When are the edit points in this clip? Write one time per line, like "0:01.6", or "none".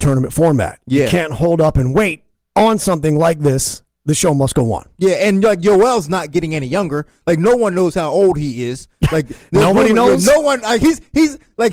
none